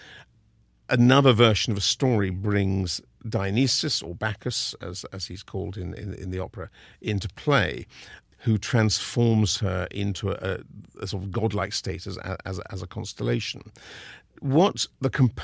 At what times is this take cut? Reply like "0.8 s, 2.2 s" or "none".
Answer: none